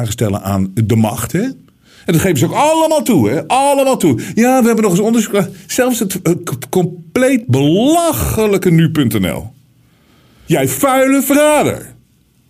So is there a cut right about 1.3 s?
no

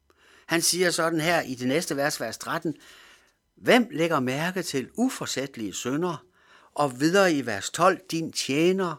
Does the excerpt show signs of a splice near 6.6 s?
yes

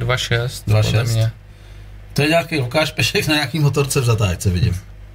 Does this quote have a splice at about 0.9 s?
no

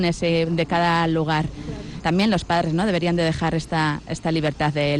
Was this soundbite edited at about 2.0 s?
yes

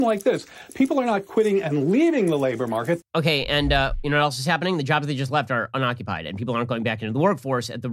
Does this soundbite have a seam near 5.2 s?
no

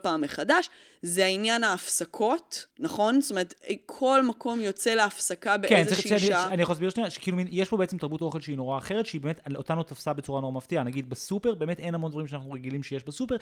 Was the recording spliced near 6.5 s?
no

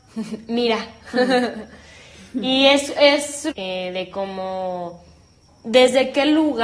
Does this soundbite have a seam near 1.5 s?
no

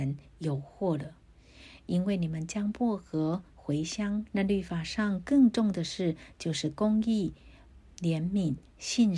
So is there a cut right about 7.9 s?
no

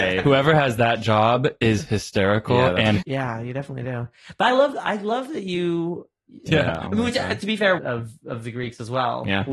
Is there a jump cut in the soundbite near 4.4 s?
no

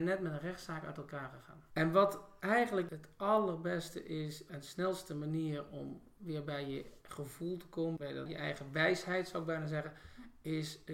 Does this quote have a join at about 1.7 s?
no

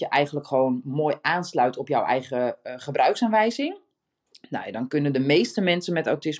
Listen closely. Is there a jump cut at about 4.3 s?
no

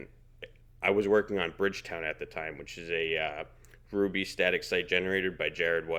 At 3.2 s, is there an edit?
no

